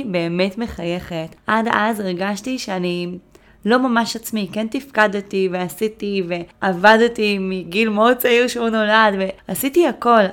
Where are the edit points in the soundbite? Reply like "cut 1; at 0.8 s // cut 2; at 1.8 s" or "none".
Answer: none

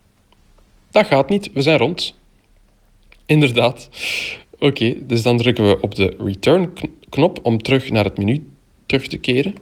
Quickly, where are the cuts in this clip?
none

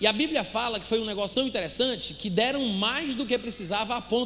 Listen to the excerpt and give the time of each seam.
cut 1; at 1.3 s

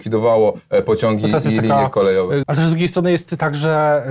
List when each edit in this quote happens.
cut 1; at 2.4 s

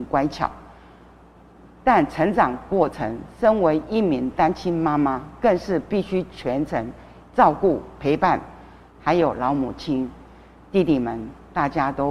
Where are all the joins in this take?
none

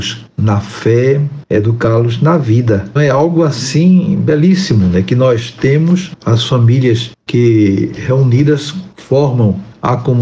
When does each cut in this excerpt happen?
cut 1; at 3.0 s

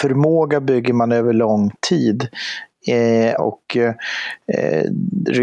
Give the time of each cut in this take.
cut 1; at 3.4 s

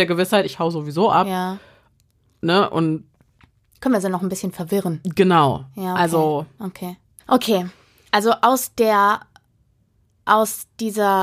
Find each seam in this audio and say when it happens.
cut 1; at 7.2 s

